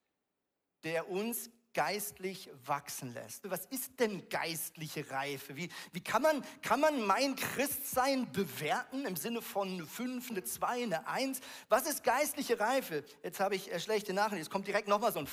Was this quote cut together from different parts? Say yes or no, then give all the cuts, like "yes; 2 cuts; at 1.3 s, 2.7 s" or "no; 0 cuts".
yes; 2 cuts; at 3.4 s, 10.3 s